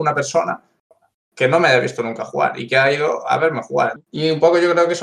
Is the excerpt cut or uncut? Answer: cut